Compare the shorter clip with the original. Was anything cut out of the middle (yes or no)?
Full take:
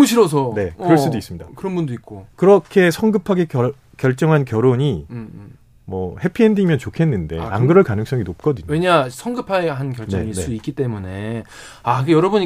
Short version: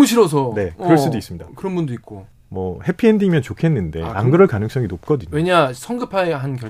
yes